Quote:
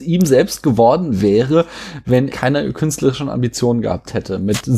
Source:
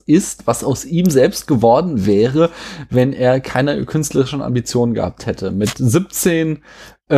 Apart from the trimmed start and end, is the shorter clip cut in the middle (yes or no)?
yes